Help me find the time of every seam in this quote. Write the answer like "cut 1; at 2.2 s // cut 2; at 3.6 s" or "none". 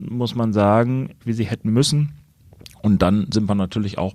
cut 1; at 1.2 s